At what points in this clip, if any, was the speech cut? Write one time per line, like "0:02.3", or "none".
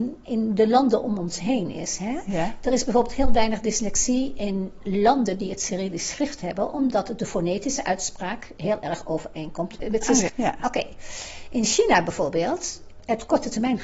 0:10.3